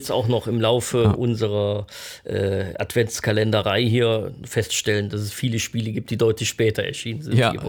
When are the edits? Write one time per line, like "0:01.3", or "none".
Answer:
none